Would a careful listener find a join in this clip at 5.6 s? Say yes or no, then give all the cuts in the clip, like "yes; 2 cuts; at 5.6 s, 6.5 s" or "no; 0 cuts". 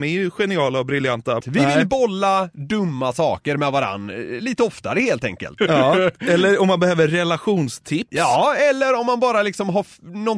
yes; 2 cuts; at 1.4 s, 5.6 s